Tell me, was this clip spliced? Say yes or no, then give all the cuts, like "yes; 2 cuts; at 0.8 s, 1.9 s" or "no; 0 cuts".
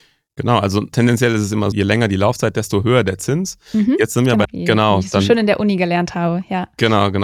yes; 2 cuts; at 1.7 s, 4.4 s